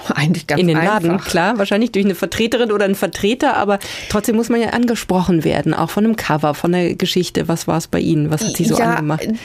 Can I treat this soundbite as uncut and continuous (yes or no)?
yes